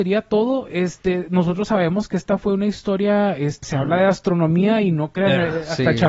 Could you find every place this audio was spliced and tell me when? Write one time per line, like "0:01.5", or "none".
0:03.6